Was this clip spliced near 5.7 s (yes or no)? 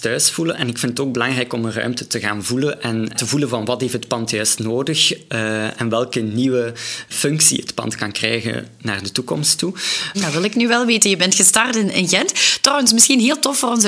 no